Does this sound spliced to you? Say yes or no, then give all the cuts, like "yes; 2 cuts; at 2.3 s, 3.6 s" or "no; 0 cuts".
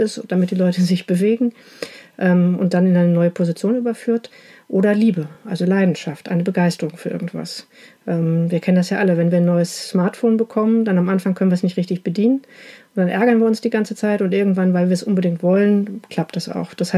no; 0 cuts